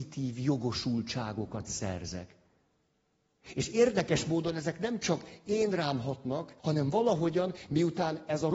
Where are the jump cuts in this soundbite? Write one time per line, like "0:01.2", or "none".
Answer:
0:06.6